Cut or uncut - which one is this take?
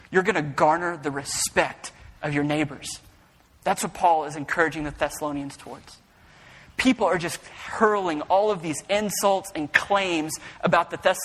uncut